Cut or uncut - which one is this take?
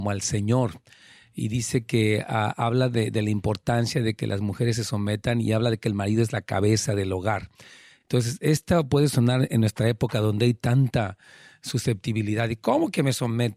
uncut